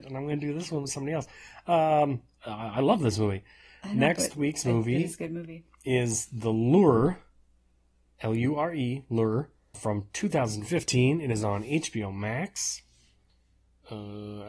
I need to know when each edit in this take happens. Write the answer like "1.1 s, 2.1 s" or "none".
9.7 s

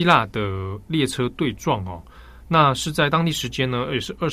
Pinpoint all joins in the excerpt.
none

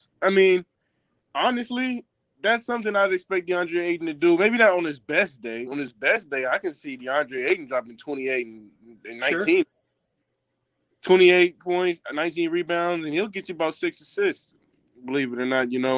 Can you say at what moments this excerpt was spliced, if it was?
none

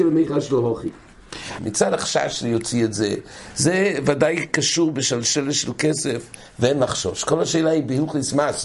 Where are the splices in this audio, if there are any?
1.6 s

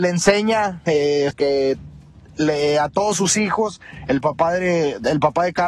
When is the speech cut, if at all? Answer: 1.3 s

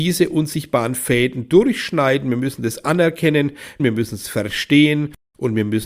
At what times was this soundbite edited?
3.8 s

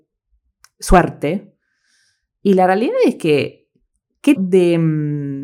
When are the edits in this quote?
4.3 s

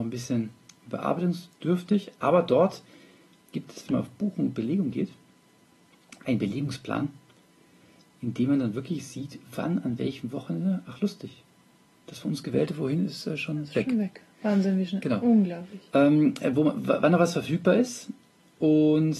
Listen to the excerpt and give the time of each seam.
none

